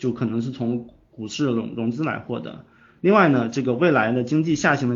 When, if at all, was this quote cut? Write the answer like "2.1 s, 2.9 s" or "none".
none